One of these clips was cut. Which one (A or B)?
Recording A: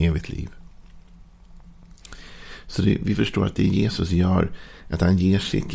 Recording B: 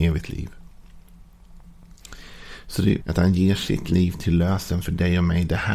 B